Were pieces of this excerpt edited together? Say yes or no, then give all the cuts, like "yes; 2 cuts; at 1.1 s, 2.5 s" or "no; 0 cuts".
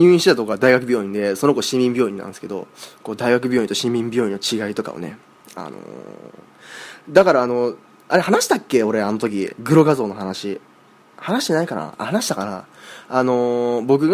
no; 0 cuts